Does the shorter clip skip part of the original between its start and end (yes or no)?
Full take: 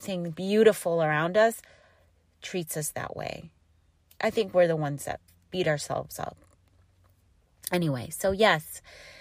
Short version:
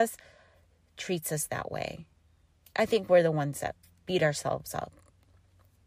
no